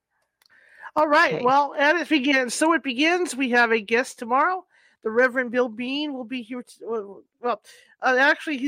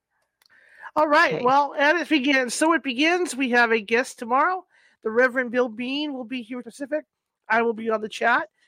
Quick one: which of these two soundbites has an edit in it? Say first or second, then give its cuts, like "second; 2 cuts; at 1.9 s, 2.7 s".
second; 1 cut; at 6.6 s